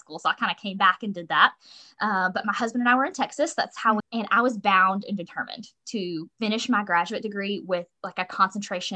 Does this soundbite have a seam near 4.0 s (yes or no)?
yes